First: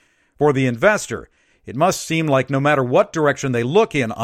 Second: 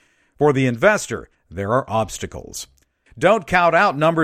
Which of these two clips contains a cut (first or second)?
second